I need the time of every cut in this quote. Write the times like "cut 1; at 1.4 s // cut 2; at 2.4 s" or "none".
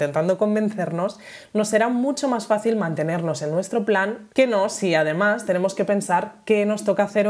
cut 1; at 4.3 s